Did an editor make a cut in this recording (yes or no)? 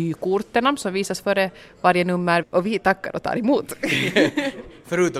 yes